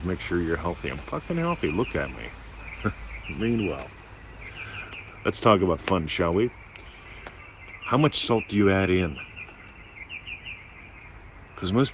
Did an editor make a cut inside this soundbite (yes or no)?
yes